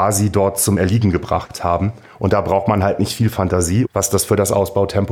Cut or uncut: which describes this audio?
cut